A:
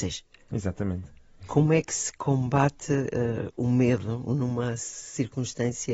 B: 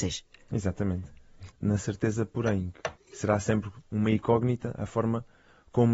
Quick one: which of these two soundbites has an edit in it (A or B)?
B